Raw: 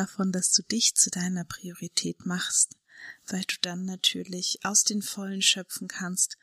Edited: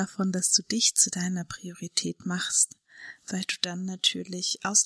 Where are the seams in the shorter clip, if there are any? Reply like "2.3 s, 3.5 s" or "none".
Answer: none